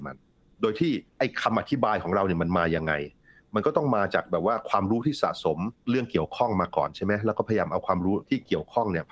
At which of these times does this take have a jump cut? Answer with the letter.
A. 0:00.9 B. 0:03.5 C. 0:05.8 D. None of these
C